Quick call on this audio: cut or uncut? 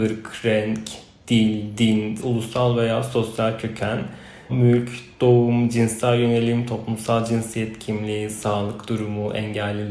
cut